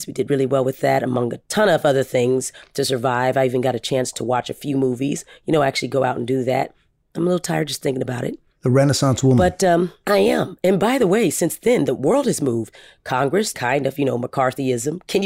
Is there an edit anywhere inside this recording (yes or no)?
yes